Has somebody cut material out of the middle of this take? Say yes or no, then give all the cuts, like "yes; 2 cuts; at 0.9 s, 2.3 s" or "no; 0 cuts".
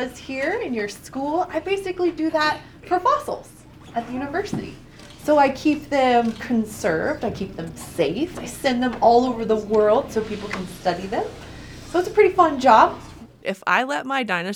yes; 2 cuts; at 8.3 s, 13.4 s